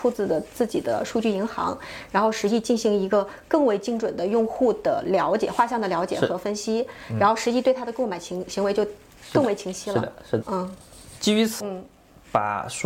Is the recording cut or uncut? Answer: cut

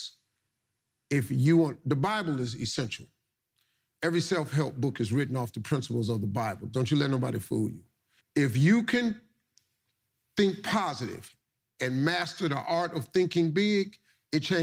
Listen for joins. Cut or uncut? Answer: cut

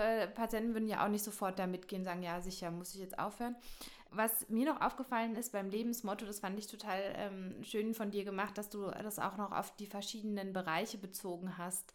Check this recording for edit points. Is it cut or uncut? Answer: uncut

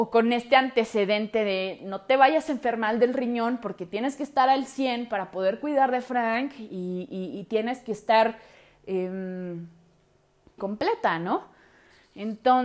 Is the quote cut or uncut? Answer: cut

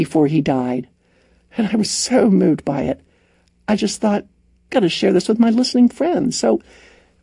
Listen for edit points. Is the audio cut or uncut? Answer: uncut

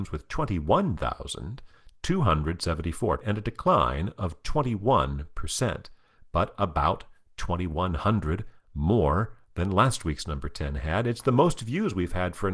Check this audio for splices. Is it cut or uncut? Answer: cut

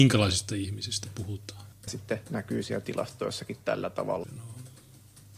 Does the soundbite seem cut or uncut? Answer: cut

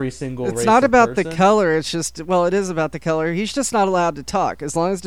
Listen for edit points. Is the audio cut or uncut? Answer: uncut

